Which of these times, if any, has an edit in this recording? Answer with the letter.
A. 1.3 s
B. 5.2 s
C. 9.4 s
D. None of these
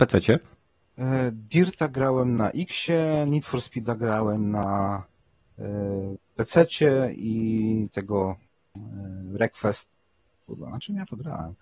D